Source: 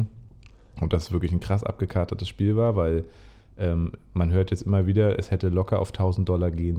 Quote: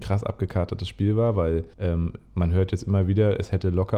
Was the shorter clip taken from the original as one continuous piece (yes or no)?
no